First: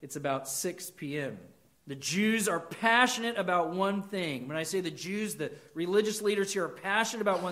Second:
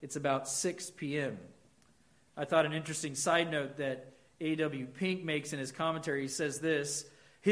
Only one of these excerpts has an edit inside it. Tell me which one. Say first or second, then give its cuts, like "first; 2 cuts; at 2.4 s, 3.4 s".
first; 1 cut; at 1.8 s